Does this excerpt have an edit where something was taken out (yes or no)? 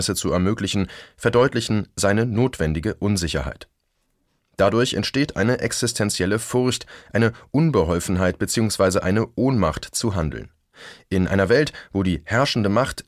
no